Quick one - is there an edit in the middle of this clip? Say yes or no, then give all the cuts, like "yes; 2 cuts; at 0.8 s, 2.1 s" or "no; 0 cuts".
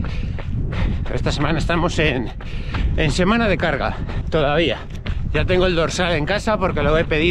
no; 0 cuts